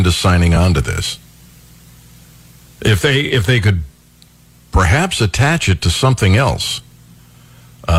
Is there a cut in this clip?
no; 0 cuts

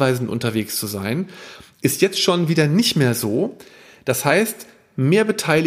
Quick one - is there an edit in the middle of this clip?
no; 0 cuts

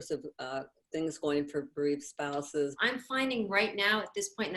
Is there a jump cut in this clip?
yes; 1 cut; at 2.8 s

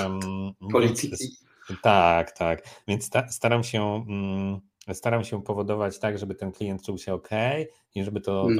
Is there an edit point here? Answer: no; 0 cuts

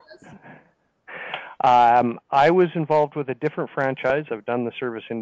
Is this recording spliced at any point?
yes; 1 cut; at 4.3 s

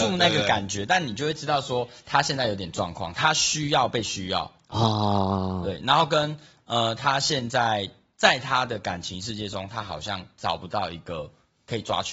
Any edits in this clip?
no; 0 cuts

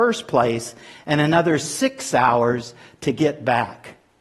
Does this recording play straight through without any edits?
yes; 0 cuts

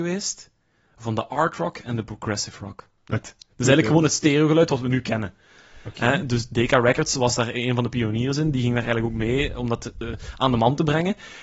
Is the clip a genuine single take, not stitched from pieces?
no; 1 cut; at 3.2 s

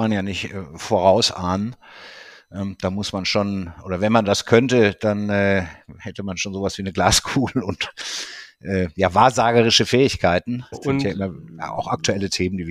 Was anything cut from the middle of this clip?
yes; 1 cut; at 10.7 s

